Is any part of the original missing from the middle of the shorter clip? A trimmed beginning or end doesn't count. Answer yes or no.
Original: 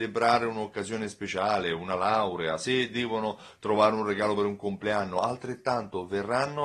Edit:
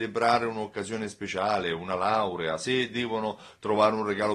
no